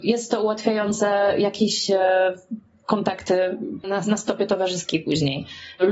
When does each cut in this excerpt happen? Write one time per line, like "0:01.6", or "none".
0:03.8